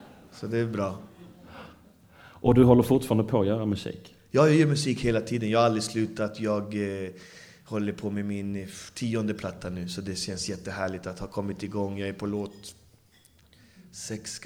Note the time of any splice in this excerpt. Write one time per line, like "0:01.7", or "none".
none